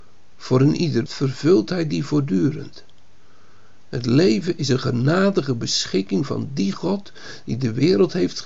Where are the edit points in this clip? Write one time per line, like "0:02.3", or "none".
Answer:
0:01.1